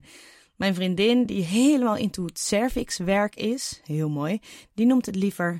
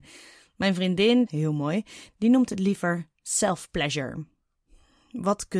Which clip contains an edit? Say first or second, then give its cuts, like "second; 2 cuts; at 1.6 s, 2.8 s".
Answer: second; 1 cut; at 1.3 s